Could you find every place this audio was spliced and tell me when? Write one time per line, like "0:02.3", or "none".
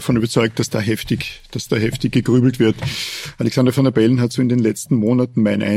none